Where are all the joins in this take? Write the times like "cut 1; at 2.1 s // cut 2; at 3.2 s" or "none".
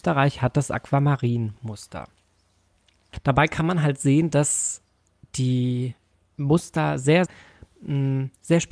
cut 1; at 7.3 s